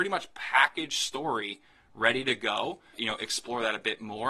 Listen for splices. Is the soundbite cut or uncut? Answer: cut